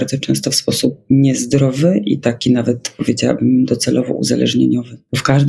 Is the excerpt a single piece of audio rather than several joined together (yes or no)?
yes